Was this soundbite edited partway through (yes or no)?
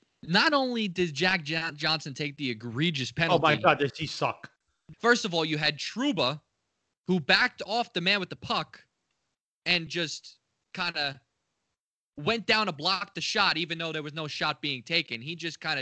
yes